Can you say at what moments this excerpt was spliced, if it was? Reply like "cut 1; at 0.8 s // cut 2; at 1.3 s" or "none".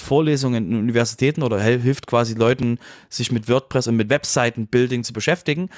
none